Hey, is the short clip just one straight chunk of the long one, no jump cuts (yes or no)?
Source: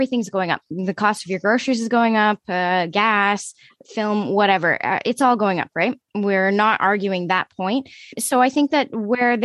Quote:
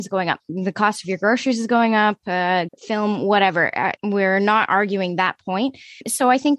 no